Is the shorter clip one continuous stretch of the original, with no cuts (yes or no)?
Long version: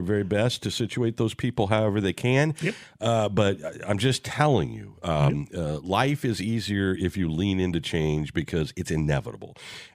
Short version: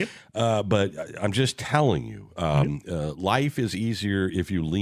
yes